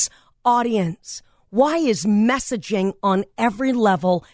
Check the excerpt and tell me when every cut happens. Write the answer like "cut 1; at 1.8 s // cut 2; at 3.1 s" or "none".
none